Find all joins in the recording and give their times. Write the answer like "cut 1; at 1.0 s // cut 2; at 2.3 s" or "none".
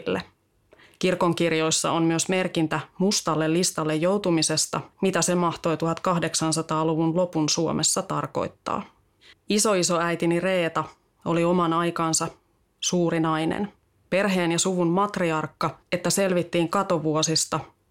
cut 1; at 4.9 s // cut 2; at 9.3 s // cut 3; at 15.9 s